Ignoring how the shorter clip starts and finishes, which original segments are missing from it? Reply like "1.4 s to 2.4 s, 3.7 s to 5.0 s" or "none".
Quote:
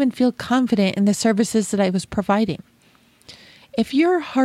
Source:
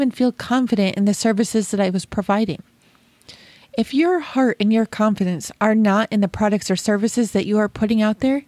none